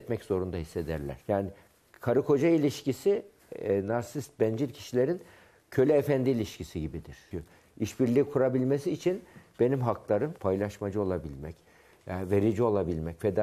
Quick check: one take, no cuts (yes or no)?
no